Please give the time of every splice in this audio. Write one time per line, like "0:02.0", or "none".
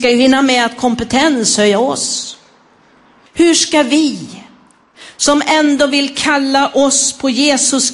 0:03.3